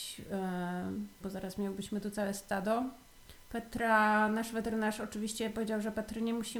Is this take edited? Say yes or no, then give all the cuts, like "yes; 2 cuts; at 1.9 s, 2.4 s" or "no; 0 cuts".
yes; 1 cut; at 1.2 s